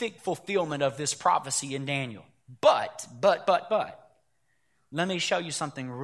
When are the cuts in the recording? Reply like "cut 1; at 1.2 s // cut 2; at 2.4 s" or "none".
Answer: none